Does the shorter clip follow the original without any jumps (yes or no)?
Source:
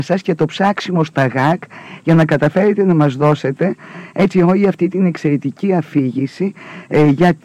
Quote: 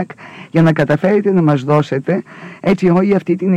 yes